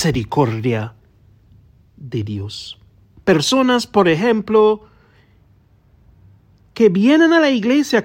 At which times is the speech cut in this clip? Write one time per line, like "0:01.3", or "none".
0:03.2